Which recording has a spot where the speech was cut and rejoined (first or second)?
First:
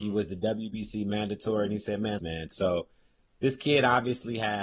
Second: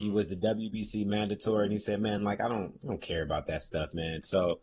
first